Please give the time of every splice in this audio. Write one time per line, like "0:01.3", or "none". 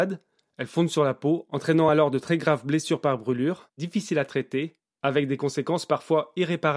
none